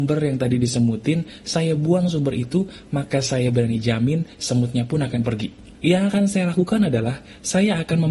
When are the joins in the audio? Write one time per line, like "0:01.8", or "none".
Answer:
0:05.7

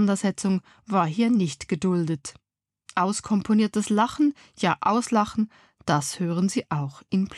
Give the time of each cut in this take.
none

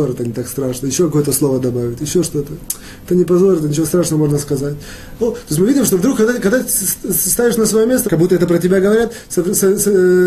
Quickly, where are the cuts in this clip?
0:05.2
0:08.1

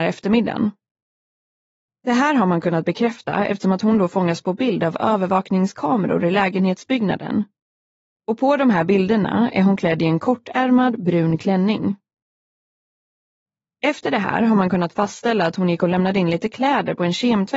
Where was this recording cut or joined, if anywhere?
none

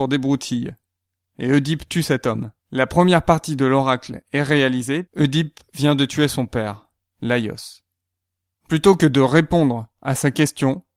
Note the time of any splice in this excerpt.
0:02.6
0:05.0
0:08.5

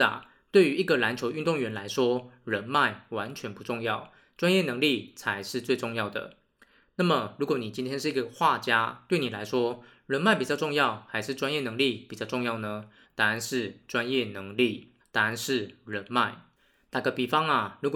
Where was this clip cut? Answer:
0:13.0
0:15.0

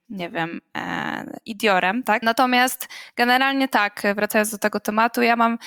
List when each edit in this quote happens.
0:02.2

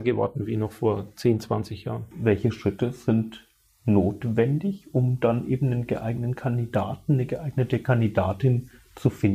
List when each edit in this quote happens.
none

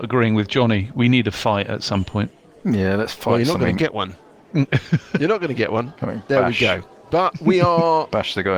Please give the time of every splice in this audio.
none

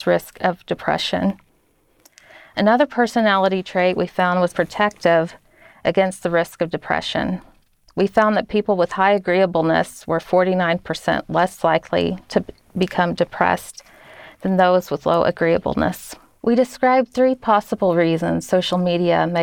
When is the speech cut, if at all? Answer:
0:04.5
0:16.4

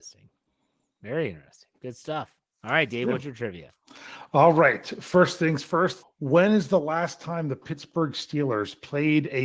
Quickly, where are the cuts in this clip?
0:06.0

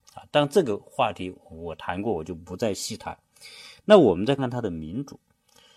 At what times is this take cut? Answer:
0:04.4

